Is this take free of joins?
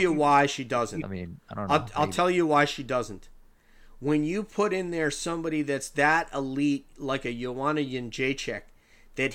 no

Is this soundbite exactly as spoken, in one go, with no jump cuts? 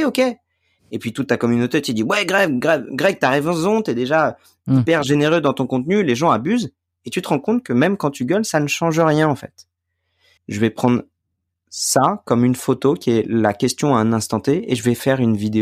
no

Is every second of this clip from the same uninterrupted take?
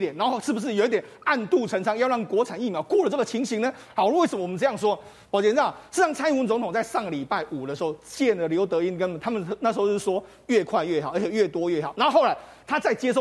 yes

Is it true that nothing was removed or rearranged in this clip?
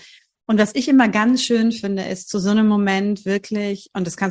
yes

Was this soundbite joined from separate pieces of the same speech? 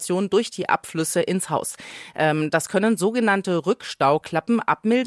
no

